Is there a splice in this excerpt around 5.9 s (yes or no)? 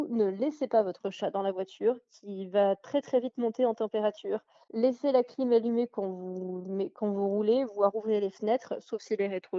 no